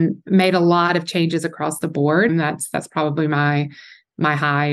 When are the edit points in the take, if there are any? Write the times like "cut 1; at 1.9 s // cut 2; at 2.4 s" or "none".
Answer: cut 1; at 2.3 s